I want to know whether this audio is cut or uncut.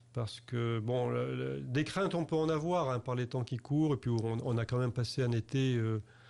uncut